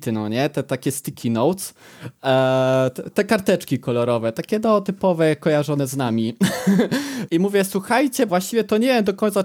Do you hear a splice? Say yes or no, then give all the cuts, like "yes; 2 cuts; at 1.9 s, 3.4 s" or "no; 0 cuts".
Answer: yes; 2 cuts; at 7.3 s, 8.3 s